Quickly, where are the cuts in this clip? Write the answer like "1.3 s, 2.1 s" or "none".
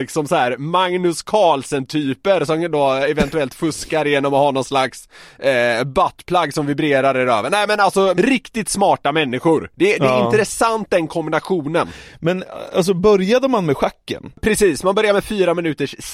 8.1 s